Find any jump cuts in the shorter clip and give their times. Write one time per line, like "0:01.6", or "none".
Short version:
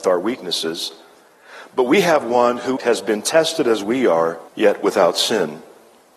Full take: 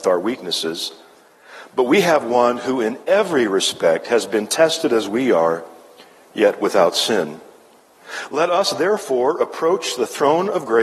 0:02.8
0:04.5